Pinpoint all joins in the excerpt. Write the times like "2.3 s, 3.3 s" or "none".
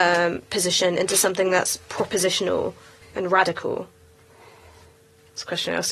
3.0 s